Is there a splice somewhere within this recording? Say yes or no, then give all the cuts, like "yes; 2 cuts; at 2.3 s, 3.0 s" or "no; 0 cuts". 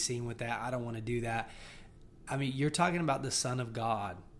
no; 0 cuts